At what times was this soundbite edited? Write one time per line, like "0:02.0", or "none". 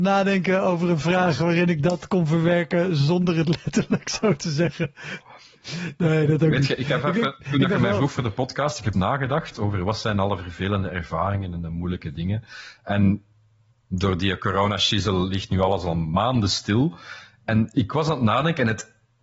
0:08.9